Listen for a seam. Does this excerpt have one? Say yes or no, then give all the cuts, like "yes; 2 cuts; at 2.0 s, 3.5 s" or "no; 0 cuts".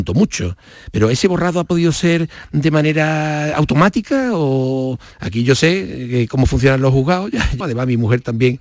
yes; 2 cuts; at 5.1 s, 7.6 s